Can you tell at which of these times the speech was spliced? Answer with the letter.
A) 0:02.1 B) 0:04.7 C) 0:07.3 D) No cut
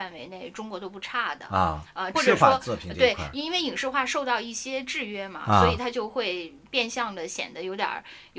A